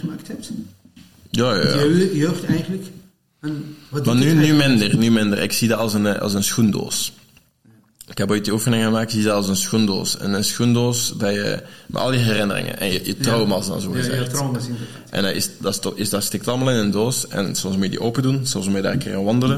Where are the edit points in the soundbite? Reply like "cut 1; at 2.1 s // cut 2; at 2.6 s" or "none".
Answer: none